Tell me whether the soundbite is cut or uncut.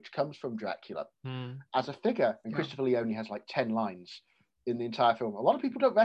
cut